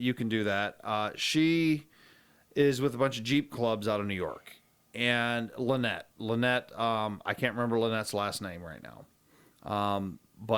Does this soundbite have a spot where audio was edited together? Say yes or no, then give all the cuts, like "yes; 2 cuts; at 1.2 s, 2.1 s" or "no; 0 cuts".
no; 0 cuts